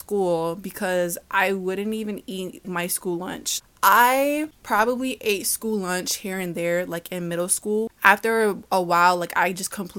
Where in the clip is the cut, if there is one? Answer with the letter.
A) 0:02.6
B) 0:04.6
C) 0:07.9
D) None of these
A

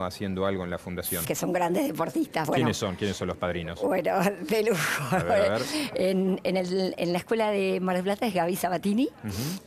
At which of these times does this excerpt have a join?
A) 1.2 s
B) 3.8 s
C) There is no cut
A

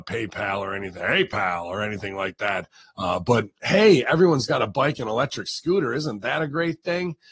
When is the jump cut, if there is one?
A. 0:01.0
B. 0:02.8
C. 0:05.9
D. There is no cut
B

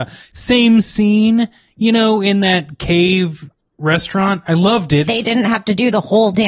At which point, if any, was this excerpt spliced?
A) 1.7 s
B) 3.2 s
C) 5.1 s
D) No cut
C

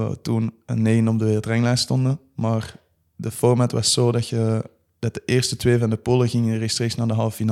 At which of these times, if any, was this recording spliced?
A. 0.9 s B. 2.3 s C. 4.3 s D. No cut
D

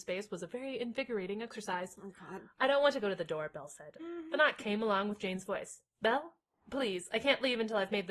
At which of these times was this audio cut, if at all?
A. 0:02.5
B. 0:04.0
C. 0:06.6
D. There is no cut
B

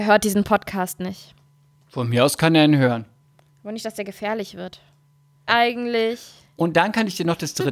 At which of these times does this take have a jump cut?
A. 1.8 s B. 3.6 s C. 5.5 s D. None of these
C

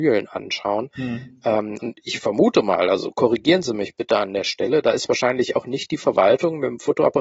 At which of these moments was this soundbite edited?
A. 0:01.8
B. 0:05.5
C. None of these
A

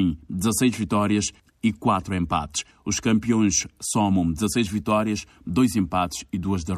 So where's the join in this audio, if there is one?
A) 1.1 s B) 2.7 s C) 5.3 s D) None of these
B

